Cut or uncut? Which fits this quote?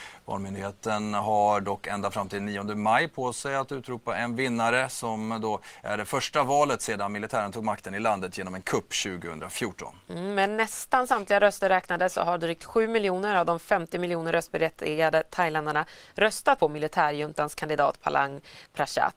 cut